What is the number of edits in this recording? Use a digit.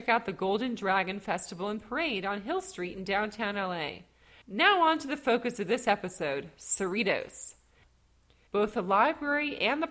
2